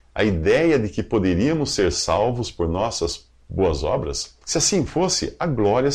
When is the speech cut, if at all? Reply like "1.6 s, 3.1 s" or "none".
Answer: 4.4 s